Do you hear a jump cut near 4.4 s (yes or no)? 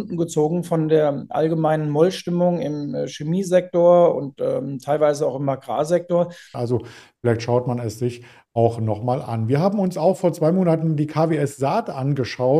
no